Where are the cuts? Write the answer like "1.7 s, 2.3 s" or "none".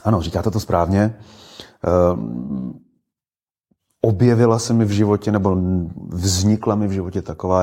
none